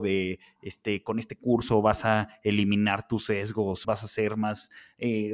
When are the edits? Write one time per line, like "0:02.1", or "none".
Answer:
0:03.8